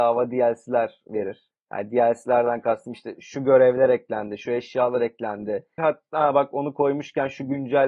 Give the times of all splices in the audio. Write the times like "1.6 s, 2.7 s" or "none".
5.8 s